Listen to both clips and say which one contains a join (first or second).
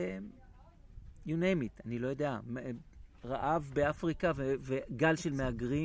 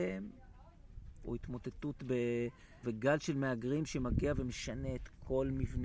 second